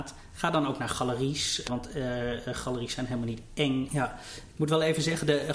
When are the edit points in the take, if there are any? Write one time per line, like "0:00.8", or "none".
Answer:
0:01.7
0:03.9

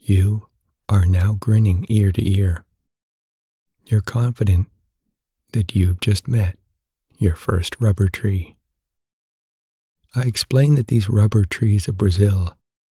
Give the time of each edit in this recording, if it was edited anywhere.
none

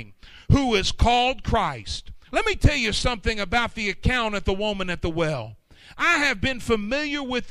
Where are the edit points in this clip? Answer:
0:02.3

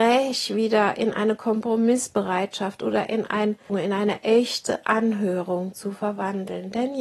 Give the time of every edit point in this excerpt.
0:03.7

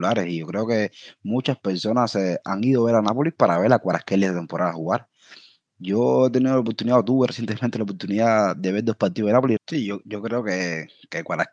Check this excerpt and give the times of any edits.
0:09.6

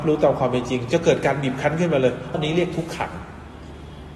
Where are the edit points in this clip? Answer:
0:02.3

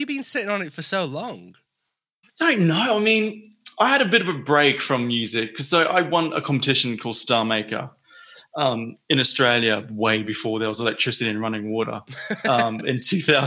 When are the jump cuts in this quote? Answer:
none

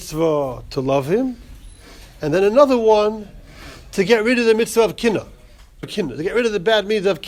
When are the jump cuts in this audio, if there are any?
0:05.8

